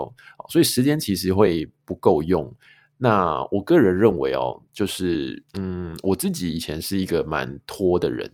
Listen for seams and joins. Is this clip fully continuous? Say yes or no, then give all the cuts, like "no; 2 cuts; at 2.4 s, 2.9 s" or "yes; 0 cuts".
no; 1 cut; at 5.5 s